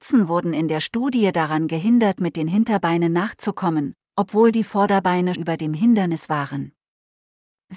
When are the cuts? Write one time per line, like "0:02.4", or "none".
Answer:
0:05.3